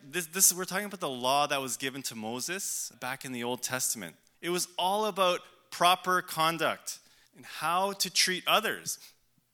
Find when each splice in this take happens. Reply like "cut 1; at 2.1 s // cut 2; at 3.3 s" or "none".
cut 1; at 2.9 s // cut 2; at 4.3 s // cut 3; at 7.3 s